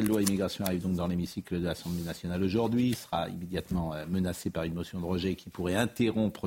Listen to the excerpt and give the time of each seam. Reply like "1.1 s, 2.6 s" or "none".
none

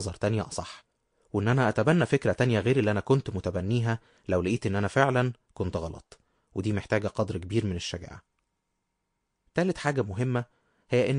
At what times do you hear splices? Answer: none

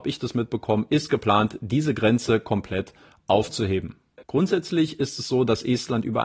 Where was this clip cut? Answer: 4.2 s

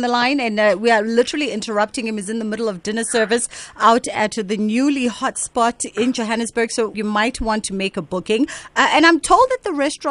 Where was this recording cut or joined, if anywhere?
6.9 s

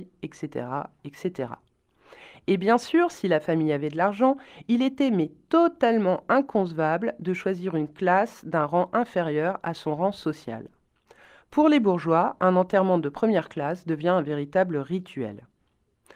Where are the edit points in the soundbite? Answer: none

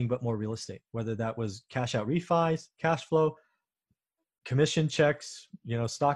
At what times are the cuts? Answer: none

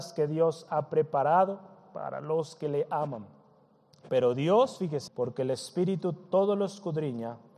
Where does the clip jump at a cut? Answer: 5.1 s

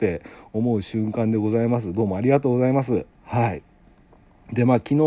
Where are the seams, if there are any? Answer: 3.1 s

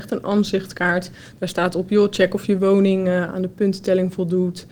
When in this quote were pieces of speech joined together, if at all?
none

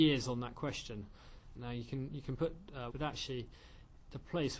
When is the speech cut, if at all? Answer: 1.5 s, 2.9 s

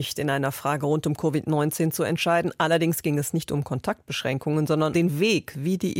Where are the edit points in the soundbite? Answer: 4.9 s

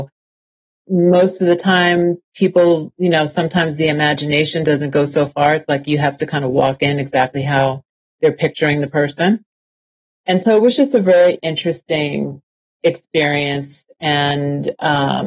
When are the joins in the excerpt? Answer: none

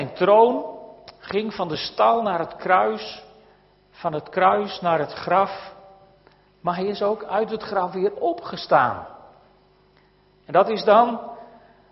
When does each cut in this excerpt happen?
none

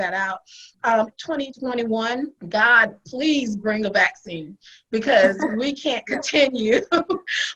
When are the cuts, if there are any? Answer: 1.1 s, 2.4 s

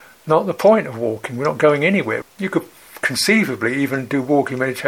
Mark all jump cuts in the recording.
2.2 s

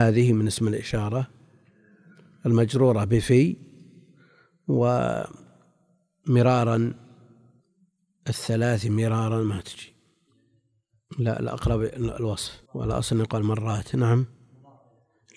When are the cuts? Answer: 12.7 s

